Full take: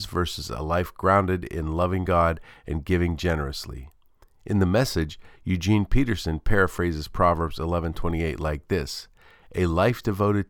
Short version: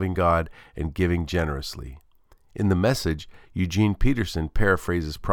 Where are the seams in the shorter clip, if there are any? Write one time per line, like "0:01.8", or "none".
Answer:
none